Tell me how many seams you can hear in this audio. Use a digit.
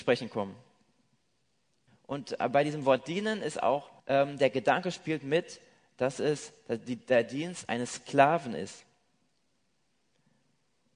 2